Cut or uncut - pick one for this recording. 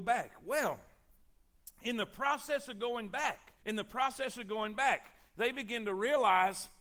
cut